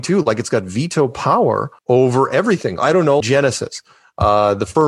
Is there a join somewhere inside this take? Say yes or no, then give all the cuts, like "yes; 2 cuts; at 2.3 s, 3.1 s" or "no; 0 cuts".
yes; 2 cuts; at 1.8 s, 3.2 s